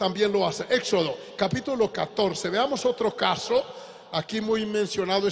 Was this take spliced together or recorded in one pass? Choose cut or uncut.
uncut